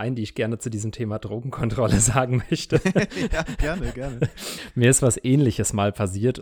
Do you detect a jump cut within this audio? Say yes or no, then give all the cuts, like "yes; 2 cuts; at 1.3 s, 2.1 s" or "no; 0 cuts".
no; 0 cuts